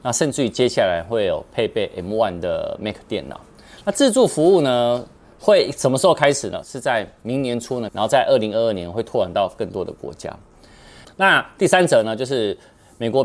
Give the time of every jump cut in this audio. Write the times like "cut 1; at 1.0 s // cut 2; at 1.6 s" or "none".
cut 1; at 6.6 s // cut 2; at 7.9 s // cut 3; at 11.0 s